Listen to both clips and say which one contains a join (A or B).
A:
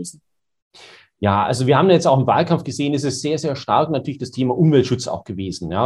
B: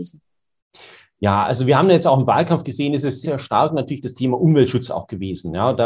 B